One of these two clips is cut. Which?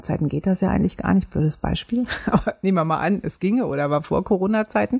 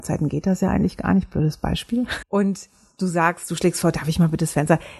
second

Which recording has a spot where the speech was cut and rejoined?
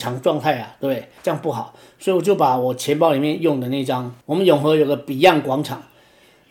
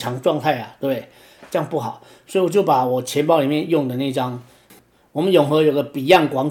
first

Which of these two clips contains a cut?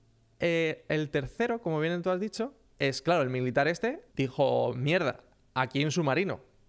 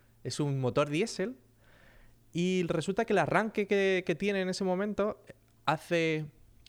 first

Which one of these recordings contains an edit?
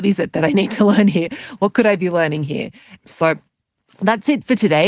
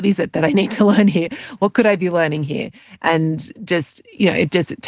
first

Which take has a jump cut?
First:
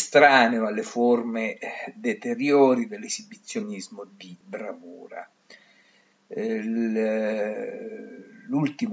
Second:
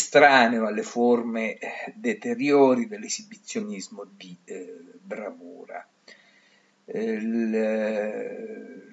first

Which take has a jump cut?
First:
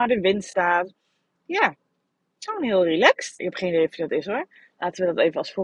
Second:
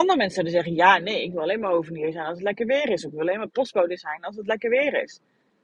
first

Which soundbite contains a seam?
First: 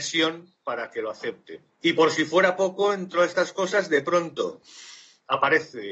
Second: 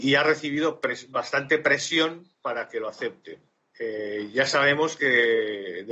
first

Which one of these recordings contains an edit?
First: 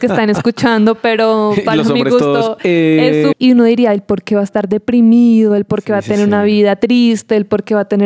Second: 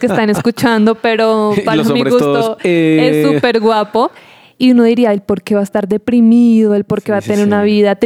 first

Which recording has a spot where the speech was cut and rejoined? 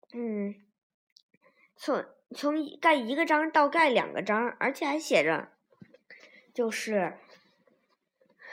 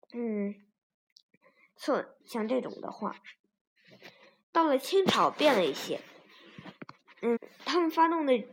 second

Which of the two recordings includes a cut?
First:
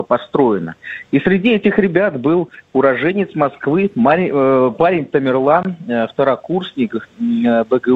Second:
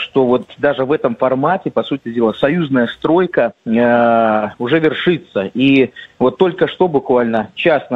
second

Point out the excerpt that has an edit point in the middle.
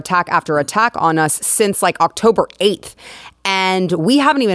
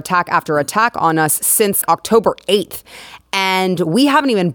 second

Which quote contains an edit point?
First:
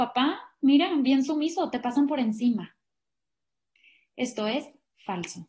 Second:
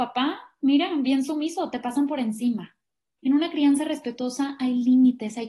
second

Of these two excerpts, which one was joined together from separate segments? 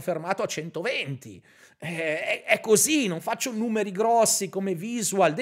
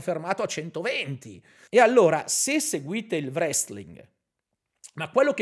second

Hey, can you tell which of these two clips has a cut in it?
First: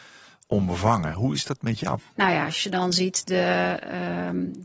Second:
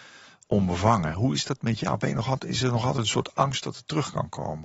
first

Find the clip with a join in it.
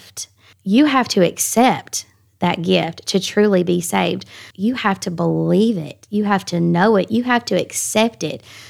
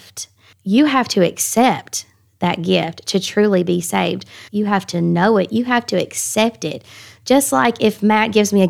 second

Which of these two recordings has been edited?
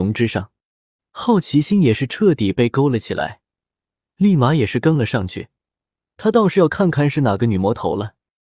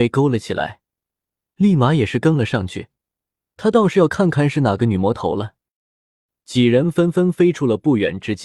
first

